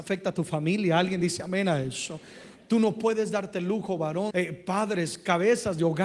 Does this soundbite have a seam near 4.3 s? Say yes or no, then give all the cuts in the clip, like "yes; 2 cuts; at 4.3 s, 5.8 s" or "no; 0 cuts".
yes; 1 cut; at 4.3 s